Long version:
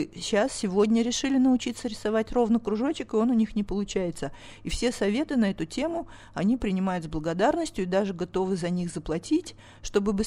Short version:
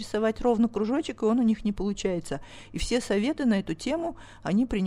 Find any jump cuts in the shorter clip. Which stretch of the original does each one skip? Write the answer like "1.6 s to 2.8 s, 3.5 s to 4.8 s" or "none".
none

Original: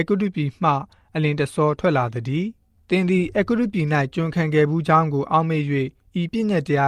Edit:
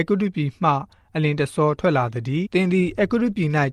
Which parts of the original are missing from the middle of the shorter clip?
2.5 s to 2.8 s

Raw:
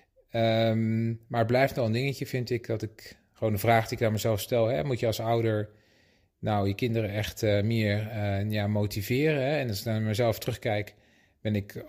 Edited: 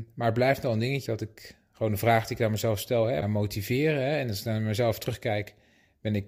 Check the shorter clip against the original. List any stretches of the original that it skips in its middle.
2.2 s to 2.7 s, 4.8 s to 8.6 s

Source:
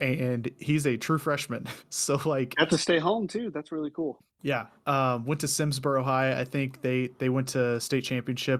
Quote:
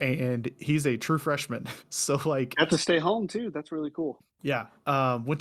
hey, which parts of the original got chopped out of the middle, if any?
none

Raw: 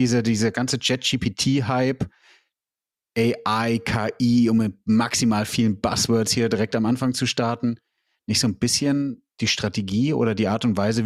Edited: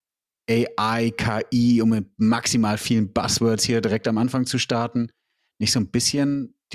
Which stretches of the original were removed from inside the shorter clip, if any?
none

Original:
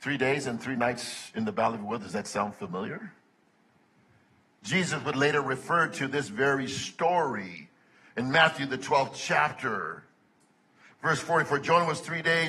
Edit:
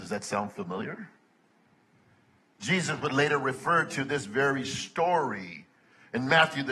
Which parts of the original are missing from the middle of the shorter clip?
none

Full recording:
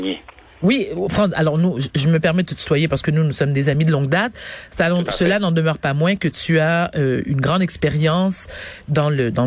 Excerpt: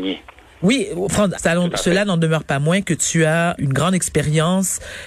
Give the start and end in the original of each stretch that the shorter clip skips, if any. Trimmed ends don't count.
1.3 s to 4.7 s, 6.9 s to 7.2 s

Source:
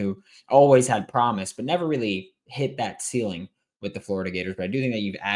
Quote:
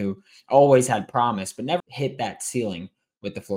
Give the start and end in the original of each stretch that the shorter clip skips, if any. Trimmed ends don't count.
1.8 s to 2.4 s

